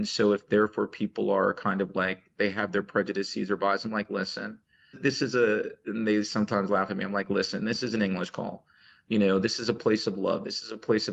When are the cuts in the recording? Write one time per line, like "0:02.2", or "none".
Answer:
0:04.9